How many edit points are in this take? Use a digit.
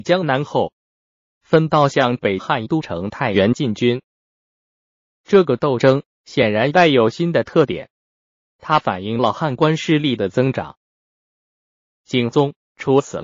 1